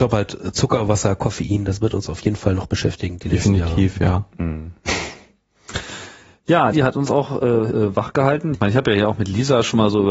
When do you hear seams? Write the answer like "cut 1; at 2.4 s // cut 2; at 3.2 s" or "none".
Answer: cut 1; at 6.7 s // cut 2; at 8.6 s

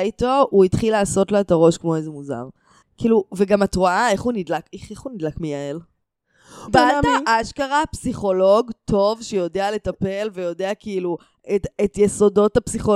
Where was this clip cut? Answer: cut 1; at 6.7 s

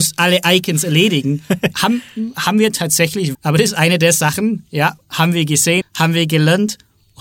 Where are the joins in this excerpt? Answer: cut 1; at 3.3 s // cut 2; at 5.8 s

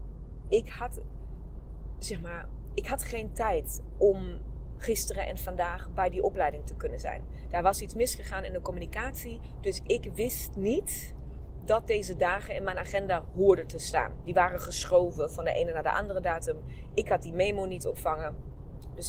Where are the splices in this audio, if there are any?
none

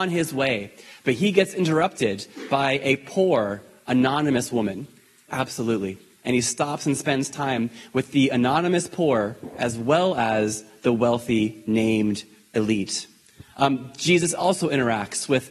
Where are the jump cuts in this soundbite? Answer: cut 1; at 5.3 s

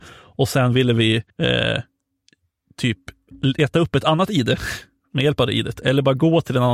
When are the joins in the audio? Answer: cut 1; at 1.3 s

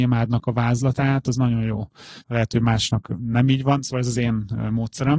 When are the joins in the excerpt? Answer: cut 1; at 2.2 s

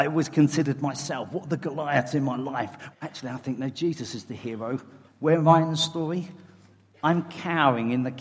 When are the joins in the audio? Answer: cut 1; at 2.9 s // cut 2; at 5.1 s

